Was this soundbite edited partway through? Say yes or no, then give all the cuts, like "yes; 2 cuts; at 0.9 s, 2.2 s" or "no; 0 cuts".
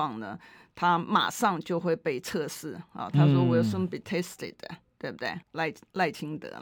yes; 1 cut; at 5.4 s